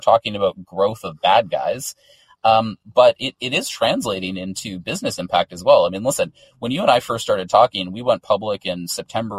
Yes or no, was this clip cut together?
no